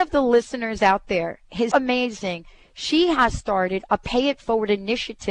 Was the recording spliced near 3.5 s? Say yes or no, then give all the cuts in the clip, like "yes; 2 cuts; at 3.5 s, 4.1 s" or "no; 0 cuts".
no; 1 cut; at 1.7 s